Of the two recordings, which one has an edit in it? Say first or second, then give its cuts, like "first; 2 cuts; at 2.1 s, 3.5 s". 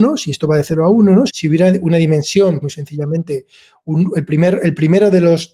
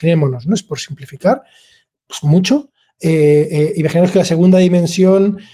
first; 2 cuts; at 1.3 s, 2.6 s